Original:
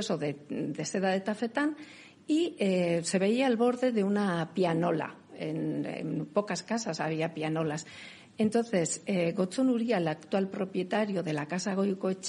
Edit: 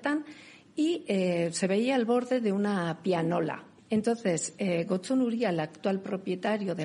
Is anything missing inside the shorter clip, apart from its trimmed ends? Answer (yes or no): yes